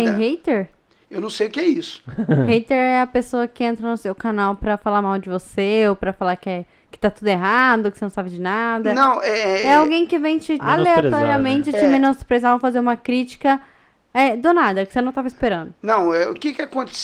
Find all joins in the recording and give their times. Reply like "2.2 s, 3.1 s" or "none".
10.6 s